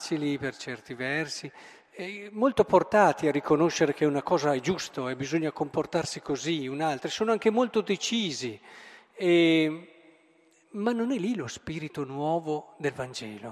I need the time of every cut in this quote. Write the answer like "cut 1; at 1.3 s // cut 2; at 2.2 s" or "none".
none